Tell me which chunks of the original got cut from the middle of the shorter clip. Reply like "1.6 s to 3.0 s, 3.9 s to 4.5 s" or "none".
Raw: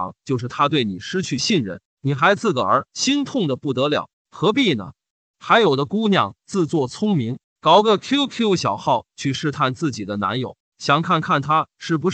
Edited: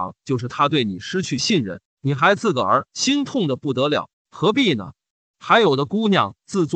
none